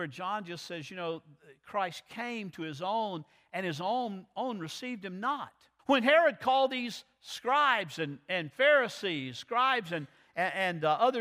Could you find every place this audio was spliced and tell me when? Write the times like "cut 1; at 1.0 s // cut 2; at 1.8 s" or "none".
cut 1; at 5.8 s